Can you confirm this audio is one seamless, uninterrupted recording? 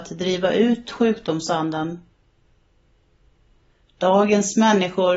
no; 1 cut; at 3.8 s

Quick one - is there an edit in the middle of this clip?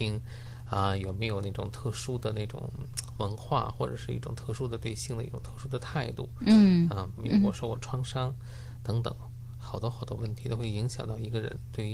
yes; 1 cut; at 7.2 s

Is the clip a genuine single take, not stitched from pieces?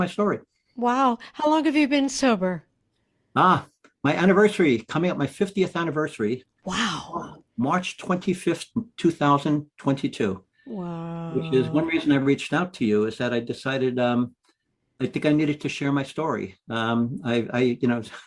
yes; 0 cuts

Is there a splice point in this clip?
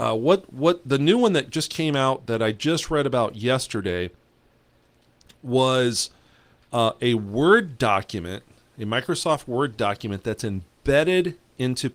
no; 0 cuts

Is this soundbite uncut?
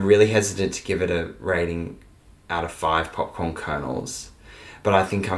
yes; 0 cuts

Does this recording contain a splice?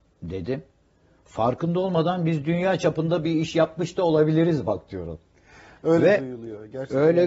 no; 0 cuts

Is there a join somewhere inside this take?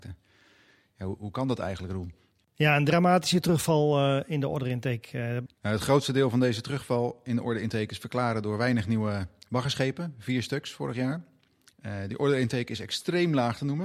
yes; 2 cuts; at 5.5 s, 11.7 s

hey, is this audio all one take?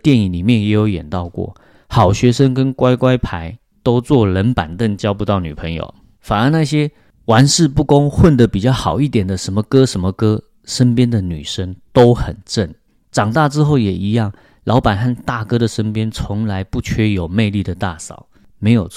yes; 0 cuts

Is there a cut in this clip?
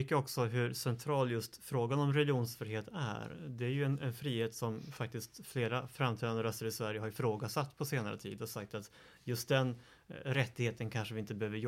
no; 0 cuts

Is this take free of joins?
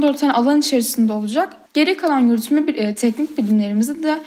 no; 1 cut; at 1.7 s

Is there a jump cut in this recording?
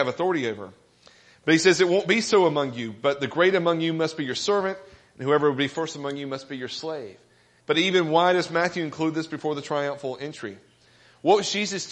yes; 1 cut; at 7.6 s

